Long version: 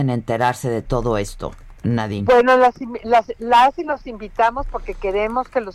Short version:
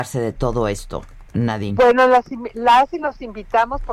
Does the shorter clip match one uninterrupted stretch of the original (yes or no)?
no